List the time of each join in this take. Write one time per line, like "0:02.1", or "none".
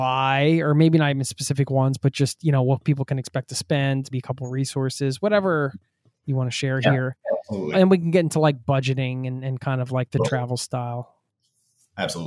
0:04.1